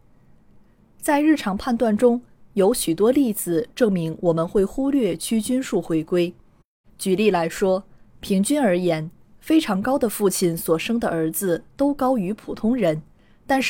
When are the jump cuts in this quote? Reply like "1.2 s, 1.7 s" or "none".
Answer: 6.8 s